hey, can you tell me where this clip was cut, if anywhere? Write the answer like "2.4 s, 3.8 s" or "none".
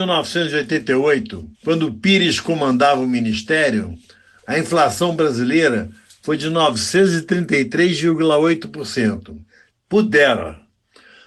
1.5 s, 9.7 s